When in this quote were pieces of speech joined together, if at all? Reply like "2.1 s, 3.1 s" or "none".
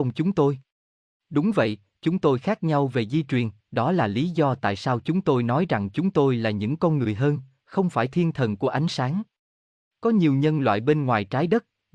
3.6 s